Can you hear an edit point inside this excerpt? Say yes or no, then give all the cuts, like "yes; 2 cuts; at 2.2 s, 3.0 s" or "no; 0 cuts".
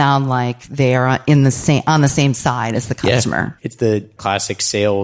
yes; 1 cut; at 3.6 s